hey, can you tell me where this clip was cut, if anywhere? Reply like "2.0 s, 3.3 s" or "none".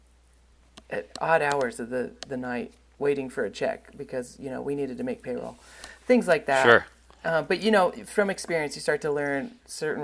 none